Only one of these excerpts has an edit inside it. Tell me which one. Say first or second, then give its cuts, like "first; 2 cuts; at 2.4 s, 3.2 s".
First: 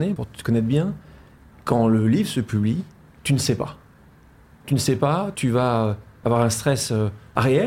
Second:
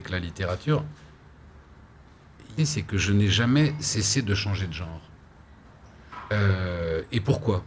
second; 1 cut; at 2.6 s